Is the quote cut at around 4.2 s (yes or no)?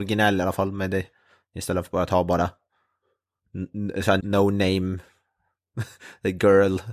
yes